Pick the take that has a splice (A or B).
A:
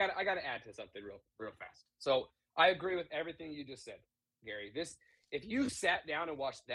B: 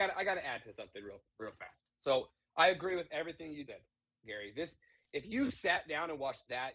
B